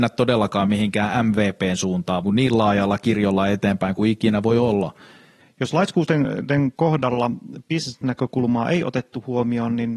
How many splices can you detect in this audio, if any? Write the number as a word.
two